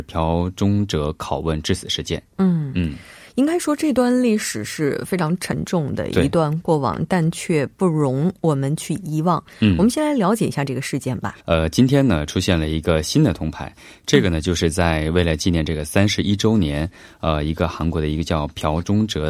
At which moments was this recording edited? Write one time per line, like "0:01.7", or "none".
0:11.4